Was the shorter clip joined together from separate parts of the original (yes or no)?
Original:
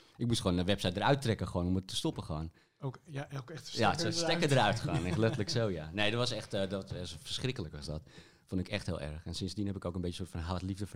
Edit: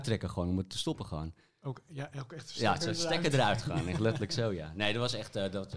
no